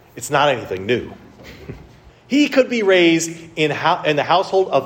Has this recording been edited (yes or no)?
yes